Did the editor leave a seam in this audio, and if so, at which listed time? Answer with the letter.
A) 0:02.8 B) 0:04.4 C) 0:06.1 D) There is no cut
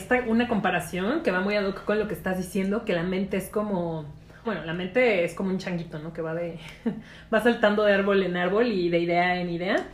B